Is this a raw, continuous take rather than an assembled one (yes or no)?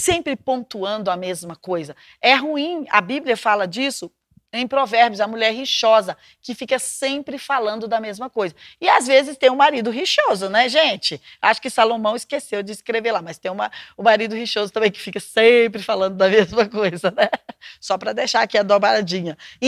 yes